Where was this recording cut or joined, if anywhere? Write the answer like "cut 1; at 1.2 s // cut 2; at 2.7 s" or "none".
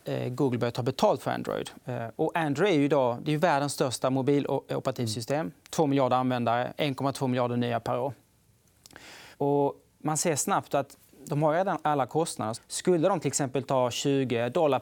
cut 1; at 9.3 s // cut 2; at 12.5 s

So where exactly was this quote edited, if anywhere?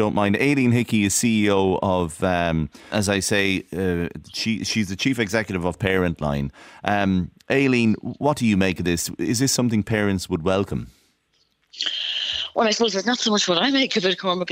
cut 1; at 2.9 s

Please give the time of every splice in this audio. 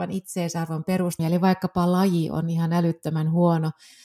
cut 1; at 1.2 s

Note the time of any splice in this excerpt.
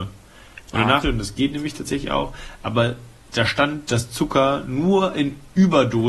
cut 1; at 1.0 s

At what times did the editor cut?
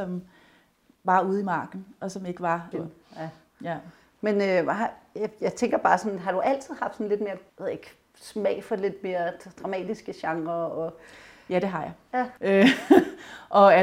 cut 1; at 2.7 s // cut 2; at 7.5 s // cut 3; at 12.4 s

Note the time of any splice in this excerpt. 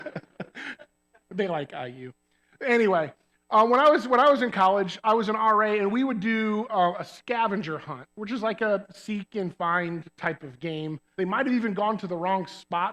cut 1; at 11.1 s

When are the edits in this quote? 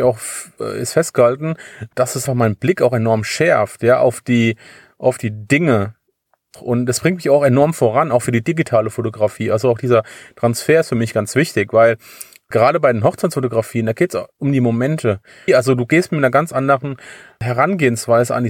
cut 1; at 2.2 s // cut 2; at 6.5 s // cut 3; at 15.5 s

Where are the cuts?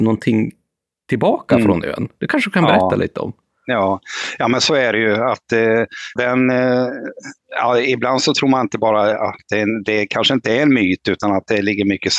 cut 1; at 6.2 s

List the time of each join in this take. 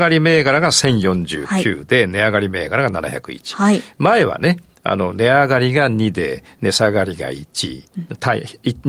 none

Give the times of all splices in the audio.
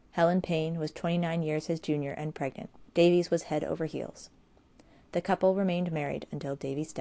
cut 1; at 2.8 s

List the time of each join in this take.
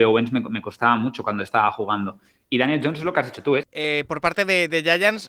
cut 1; at 2.5 s // cut 2; at 3.6 s

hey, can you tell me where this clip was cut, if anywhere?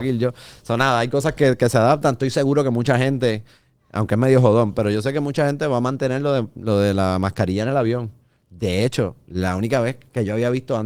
none

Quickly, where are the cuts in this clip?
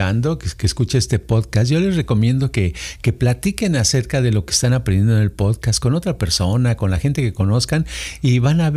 none

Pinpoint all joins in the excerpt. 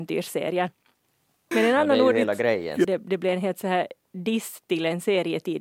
cut 1; at 1.5 s // cut 2; at 2.8 s

